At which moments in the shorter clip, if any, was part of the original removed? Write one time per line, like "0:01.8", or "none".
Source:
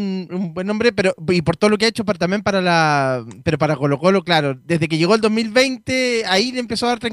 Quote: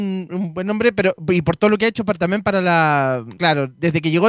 0:03.4